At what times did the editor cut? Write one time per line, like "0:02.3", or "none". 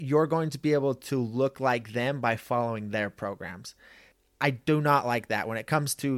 none